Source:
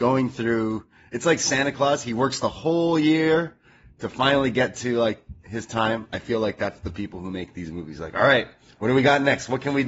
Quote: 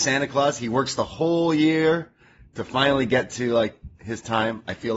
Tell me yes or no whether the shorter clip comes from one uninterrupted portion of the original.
yes